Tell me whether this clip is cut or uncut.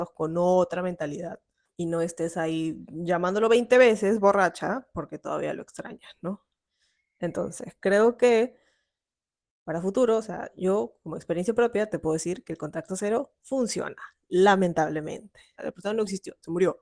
cut